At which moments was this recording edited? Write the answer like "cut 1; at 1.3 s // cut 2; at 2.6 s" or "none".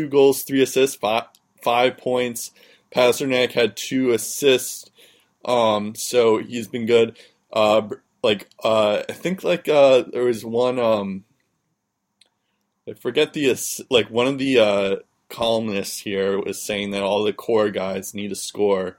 none